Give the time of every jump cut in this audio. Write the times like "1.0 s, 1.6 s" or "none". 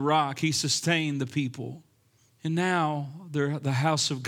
2.3 s